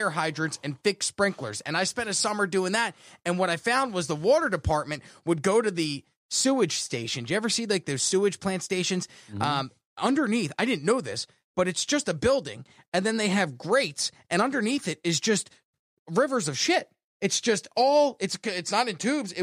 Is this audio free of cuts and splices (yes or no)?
yes